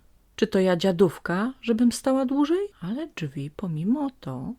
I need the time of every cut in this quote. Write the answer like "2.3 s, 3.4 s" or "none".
2.7 s